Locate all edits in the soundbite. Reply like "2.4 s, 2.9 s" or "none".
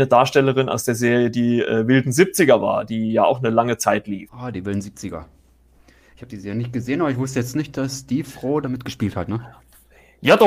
4.3 s